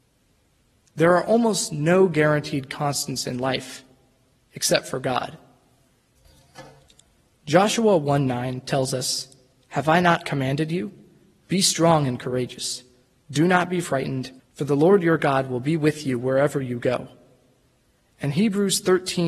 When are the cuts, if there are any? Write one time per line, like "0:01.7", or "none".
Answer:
0:14.4